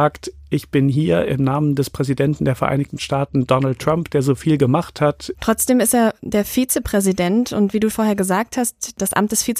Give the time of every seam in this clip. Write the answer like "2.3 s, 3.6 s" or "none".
5.3 s, 7.9 s